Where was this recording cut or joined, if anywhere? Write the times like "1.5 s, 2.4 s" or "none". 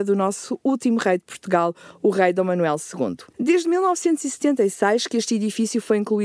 3.3 s